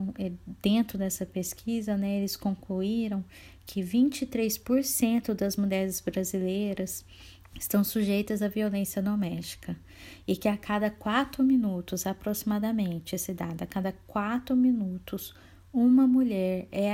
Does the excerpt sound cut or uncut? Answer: cut